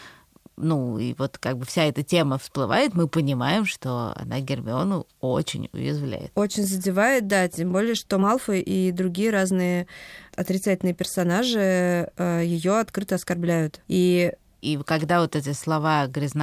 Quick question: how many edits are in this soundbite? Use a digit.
1